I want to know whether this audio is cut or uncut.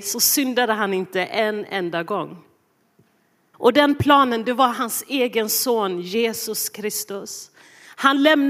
cut